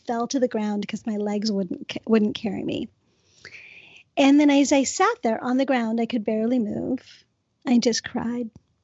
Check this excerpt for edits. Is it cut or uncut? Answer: uncut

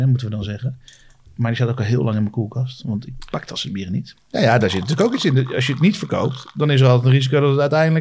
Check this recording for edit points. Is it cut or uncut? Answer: cut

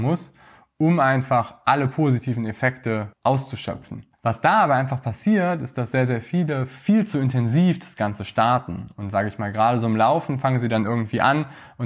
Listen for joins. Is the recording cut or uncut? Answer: uncut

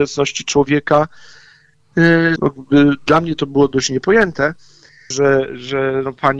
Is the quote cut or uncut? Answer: cut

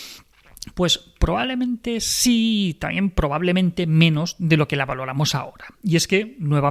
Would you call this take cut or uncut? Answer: uncut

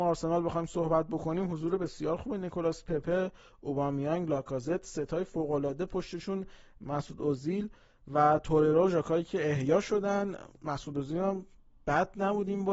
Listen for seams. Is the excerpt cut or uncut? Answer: uncut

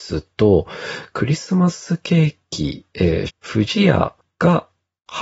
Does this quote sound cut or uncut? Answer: cut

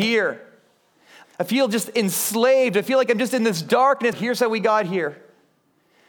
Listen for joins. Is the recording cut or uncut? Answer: cut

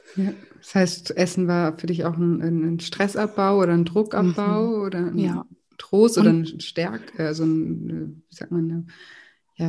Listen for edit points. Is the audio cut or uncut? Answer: uncut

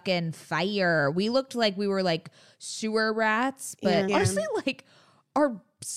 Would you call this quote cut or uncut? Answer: cut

